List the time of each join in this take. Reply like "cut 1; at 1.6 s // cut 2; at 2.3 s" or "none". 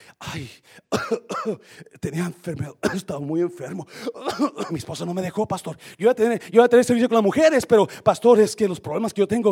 cut 1; at 4.7 s